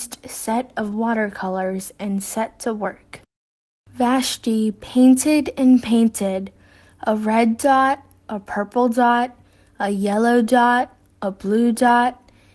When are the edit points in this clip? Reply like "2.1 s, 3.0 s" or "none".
none